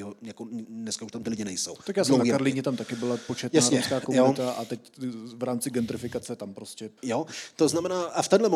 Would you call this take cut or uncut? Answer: cut